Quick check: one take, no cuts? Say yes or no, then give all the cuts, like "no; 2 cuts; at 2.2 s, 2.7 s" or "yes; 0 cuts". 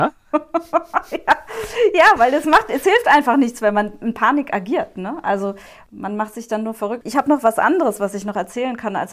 yes; 0 cuts